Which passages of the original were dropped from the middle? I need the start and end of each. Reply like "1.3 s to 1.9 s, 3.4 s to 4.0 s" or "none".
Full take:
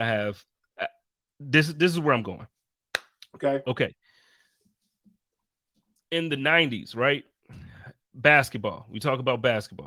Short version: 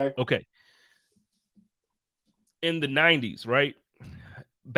none

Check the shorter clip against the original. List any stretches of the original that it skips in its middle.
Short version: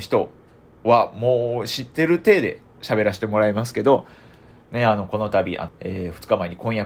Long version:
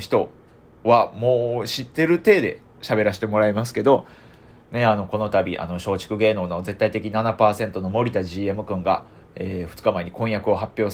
5.7 s to 9.2 s

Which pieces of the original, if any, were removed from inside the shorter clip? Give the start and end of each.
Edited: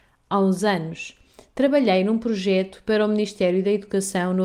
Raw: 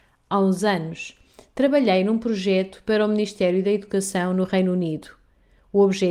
none

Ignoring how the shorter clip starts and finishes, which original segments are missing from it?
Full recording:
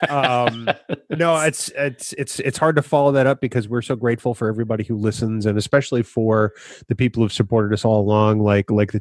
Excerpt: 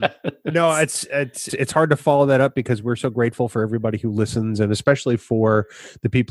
2.1 s to 2.3 s

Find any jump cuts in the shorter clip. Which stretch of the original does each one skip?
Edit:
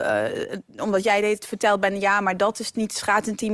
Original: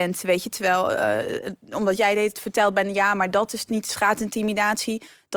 none

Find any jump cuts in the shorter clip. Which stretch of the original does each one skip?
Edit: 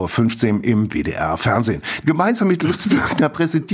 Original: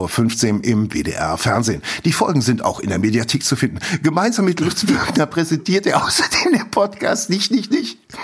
2.0 s to 4.0 s

